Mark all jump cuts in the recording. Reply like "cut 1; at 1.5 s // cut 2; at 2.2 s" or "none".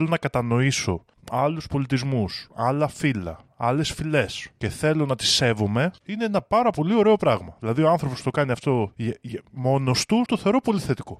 cut 1; at 10.3 s